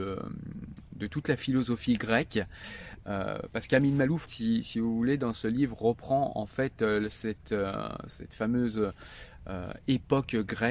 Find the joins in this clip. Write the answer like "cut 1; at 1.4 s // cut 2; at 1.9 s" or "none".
cut 1; at 4.3 s